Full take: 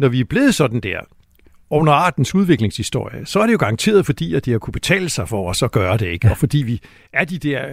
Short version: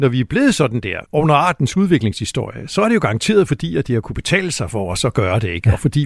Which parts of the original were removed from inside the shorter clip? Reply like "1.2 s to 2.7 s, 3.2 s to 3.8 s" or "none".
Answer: 1.1 s to 1.6 s